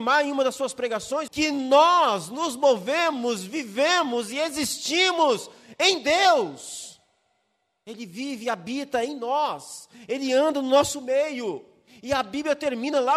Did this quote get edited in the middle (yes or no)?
yes